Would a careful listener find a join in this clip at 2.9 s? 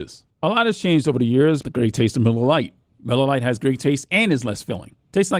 yes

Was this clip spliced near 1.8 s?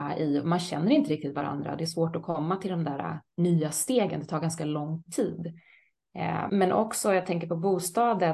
no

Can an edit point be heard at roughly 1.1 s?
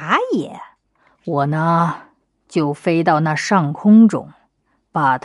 yes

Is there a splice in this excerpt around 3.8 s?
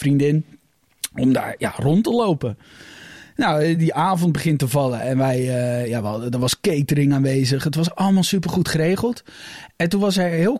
no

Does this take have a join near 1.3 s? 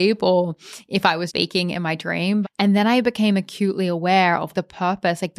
yes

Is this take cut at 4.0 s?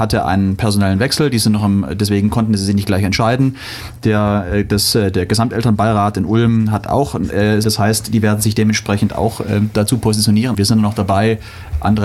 no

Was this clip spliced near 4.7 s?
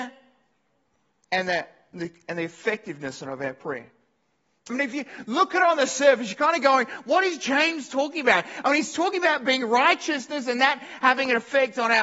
yes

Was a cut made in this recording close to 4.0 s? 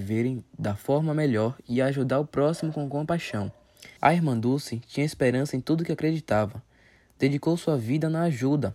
yes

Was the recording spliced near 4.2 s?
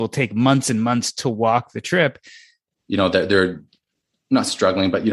no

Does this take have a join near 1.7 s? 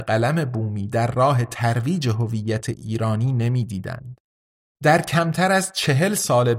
no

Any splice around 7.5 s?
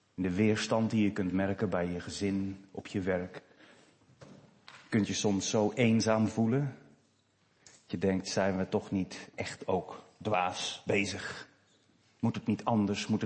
no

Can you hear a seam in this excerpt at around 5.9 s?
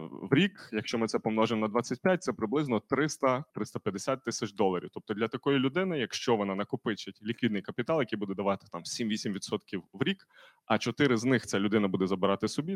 no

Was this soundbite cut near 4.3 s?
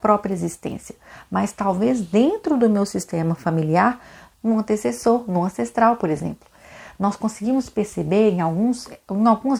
yes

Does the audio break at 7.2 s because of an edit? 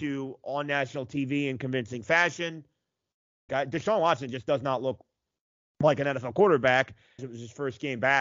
yes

